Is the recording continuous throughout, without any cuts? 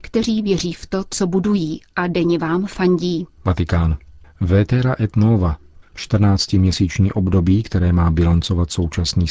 no; 2 cuts; at 3.4 s, 5.8 s

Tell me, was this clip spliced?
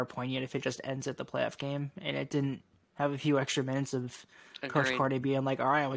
no; 0 cuts

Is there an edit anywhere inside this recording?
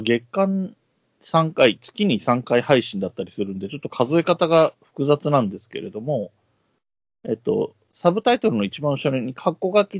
no; 0 cuts

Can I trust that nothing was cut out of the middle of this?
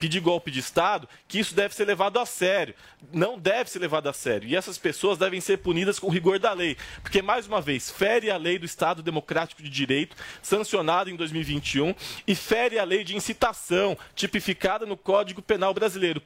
yes; 0 cuts

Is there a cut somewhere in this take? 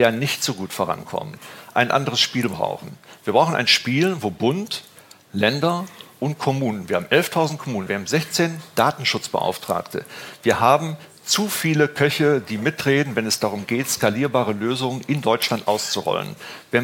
yes; 1 cut; at 7.9 s

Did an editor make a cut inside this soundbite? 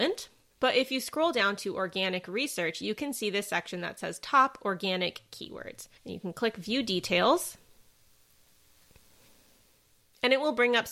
yes; 1 cut; at 6.0 s

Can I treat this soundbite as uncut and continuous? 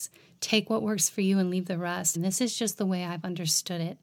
no; 1 cut; at 2.2 s

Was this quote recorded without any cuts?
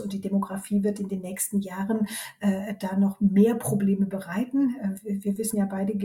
yes; 0 cuts

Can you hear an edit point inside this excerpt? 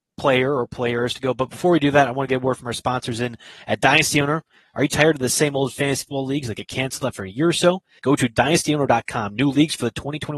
yes; 1 cut; at 8.0 s

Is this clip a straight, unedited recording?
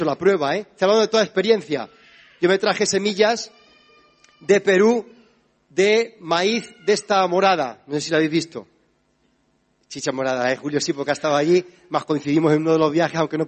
yes; 0 cuts

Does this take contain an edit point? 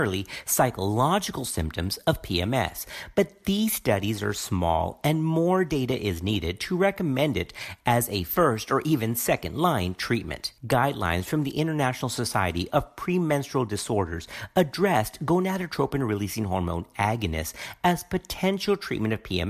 yes; 1 cut; at 10.6 s

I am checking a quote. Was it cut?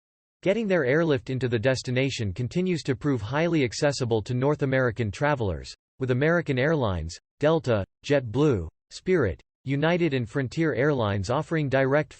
no; 0 cuts

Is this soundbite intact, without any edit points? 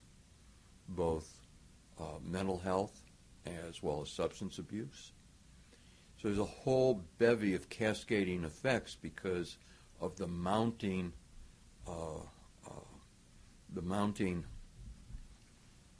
yes; 0 cuts

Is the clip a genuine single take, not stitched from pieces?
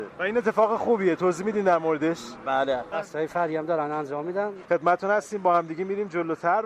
no; 1 cut; at 2.9 s

